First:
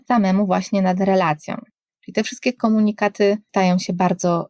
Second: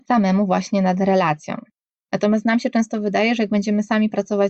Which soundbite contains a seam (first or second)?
first